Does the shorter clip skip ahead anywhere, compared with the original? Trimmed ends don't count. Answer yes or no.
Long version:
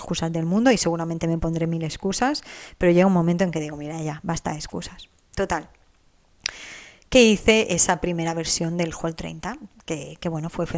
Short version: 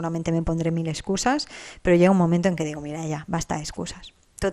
no